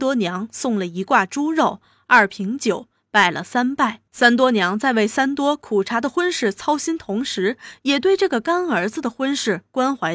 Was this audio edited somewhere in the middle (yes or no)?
yes